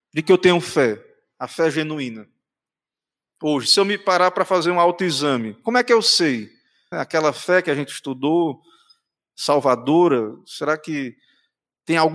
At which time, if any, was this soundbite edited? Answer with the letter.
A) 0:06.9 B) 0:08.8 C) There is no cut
A